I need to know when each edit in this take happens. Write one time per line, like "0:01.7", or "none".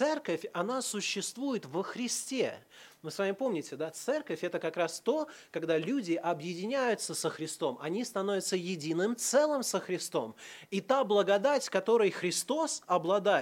none

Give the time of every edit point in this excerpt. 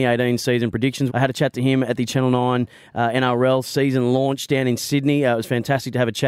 0:01.1

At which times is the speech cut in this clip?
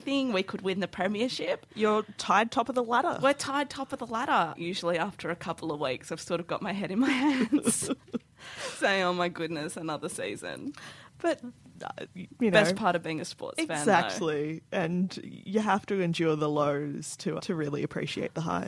0:04.6
0:17.4

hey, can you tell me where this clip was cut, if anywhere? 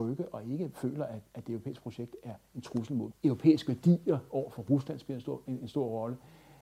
0:03.1

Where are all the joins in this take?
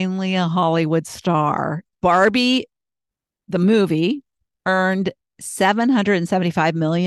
0:01.8

